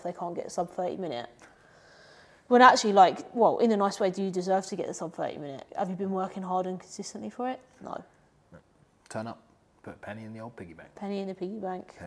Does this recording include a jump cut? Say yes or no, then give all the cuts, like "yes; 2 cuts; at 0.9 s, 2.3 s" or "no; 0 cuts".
no; 0 cuts